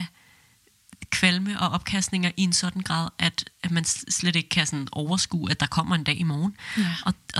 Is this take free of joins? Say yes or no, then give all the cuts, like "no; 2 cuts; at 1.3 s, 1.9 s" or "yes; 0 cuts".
yes; 0 cuts